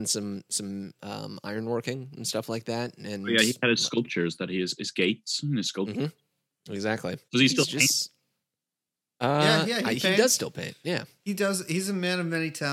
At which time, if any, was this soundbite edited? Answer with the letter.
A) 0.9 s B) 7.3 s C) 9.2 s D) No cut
B